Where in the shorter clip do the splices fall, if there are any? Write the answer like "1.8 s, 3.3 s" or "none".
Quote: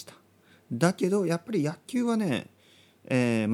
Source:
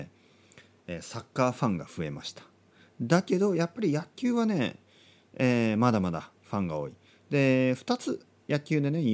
none